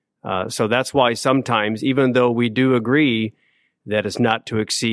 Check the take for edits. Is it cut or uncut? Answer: uncut